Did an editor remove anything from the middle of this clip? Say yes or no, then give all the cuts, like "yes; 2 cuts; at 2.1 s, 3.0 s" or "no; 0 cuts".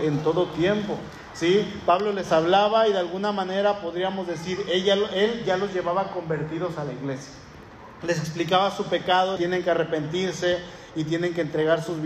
yes; 2 cuts; at 8.0 s, 9.4 s